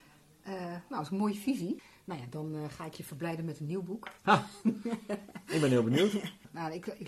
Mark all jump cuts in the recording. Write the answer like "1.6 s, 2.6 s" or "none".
none